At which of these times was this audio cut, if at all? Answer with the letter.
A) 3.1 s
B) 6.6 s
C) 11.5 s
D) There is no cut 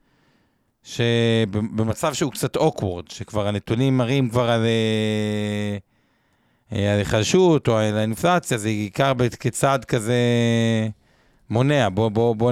D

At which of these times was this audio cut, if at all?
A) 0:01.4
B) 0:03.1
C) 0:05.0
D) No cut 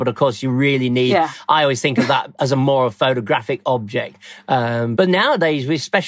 C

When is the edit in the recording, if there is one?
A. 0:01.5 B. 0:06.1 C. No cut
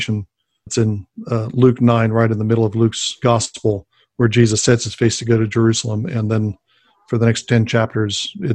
C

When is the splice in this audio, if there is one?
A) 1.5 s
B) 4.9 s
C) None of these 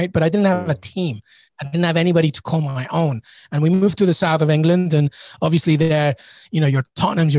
C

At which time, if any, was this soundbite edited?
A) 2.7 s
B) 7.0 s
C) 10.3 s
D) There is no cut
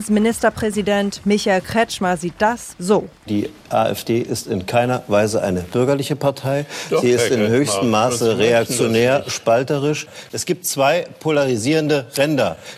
A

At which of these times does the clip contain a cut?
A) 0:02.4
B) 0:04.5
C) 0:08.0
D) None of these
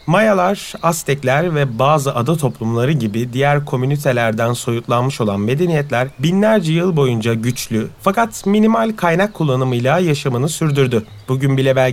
C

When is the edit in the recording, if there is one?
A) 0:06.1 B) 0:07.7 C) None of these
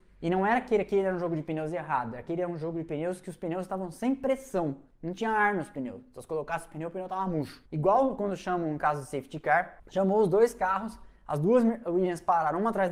B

